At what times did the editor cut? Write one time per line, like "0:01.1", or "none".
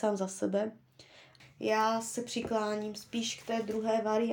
0:01.4

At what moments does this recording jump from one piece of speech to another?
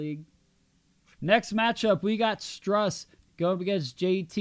0:01.2
0:03.3

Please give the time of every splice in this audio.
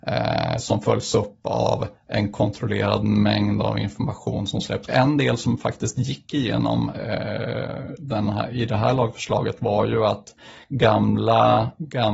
0:04.9

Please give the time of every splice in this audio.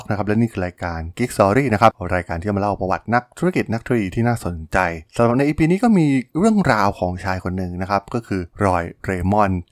none

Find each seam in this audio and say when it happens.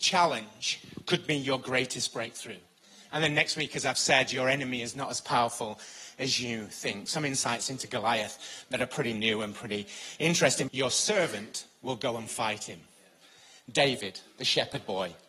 0:03.1
0:07.1
0:10.7

